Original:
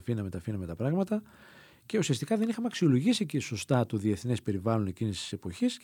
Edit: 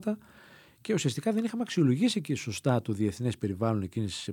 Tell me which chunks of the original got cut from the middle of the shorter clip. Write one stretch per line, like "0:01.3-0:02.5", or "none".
none